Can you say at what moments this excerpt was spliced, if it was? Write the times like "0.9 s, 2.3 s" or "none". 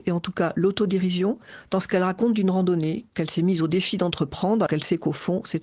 4.7 s